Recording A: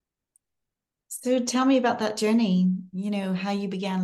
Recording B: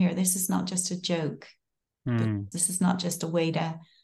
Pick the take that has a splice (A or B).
B